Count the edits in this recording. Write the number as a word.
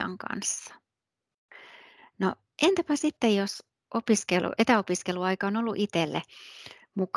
zero